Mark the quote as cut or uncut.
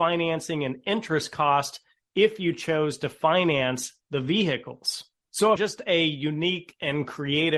cut